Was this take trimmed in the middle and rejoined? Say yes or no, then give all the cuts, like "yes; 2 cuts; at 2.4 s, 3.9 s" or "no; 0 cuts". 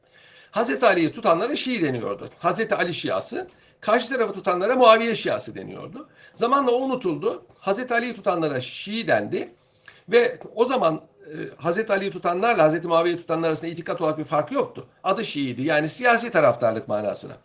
no; 0 cuts